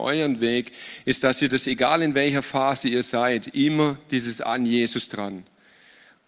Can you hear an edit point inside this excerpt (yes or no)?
no